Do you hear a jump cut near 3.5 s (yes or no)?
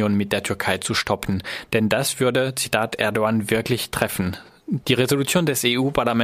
no